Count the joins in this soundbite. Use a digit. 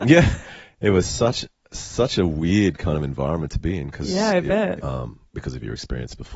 1